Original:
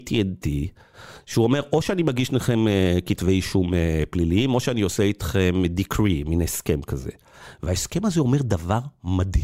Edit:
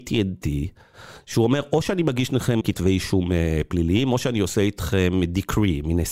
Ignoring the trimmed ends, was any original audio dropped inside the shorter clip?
yes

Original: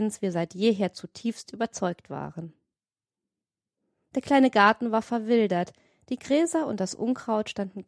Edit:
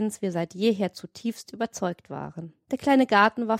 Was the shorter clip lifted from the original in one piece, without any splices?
no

